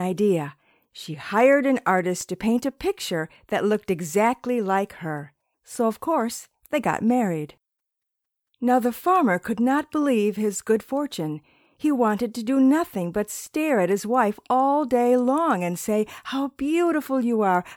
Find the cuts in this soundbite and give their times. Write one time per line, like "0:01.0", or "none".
0:05.5